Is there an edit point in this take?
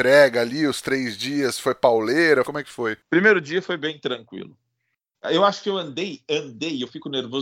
yes; 2 cuts; at 2.4 s, 5.1 s

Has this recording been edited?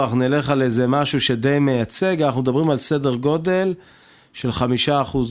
no; 0 cuts

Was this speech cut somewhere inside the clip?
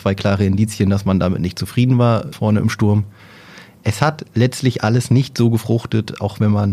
yes; 1 cut; at 2.3 s

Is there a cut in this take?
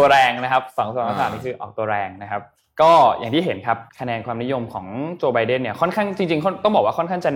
yes; 1 cut; at 3.9 s

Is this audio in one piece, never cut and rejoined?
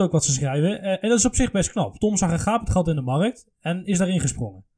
yes; 0 cuts

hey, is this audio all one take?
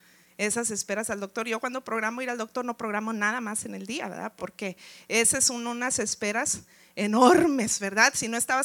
yes; 0 cuts

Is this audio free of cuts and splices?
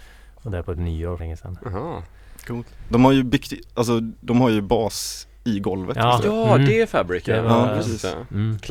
no; 1 cut; at 1.2 s

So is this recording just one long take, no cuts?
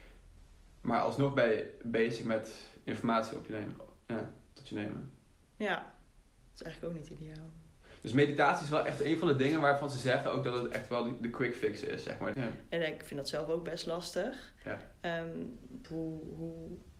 no; 2 cuts; at 12.3 s, 15.8 s

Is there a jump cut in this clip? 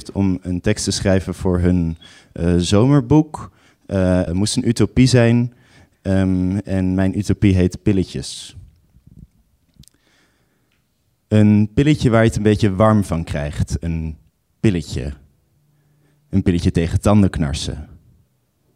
yes; 1 cut; at 4.3 s

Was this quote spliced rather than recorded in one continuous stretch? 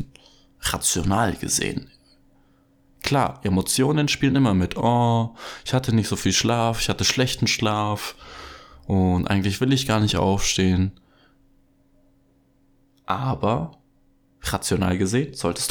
no; 0 cuts

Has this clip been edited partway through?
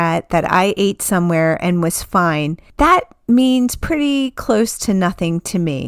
no; 0 cuts

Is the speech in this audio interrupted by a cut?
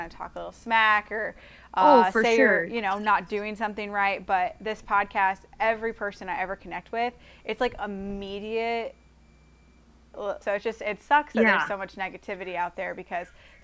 yes; 1 cut; at 10.4 s

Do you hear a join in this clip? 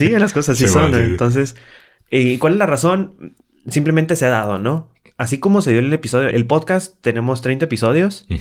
yes; 1 cut; at 6.3 s

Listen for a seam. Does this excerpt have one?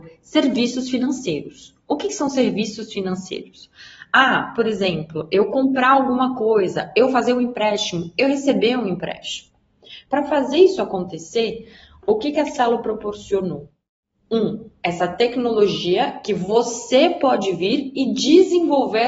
yes; 1 cut; at 10.1 s

